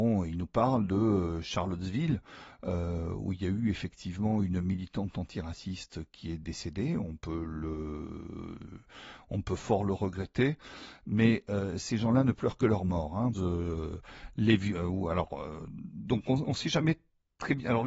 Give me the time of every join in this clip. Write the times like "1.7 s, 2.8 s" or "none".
13.3 s

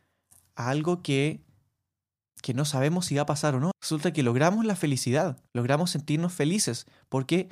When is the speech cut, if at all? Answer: 3.7 s, 5.5 s

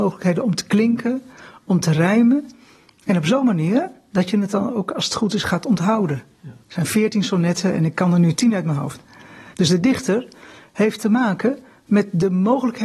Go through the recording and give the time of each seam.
6.6 s, 9.5 s

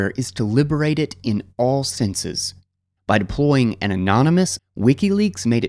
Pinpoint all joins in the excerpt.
3.0 s, 4.6 s

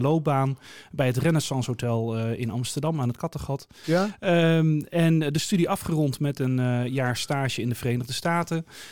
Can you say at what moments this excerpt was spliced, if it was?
3.8 s

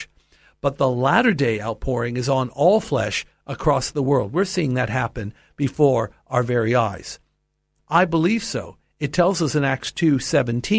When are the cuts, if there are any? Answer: 7.8 s

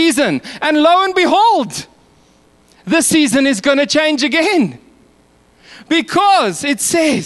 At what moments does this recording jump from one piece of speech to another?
none

